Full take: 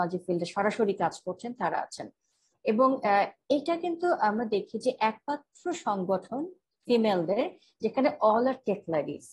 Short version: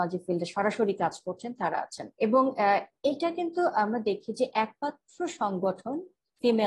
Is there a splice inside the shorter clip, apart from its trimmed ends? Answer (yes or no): yes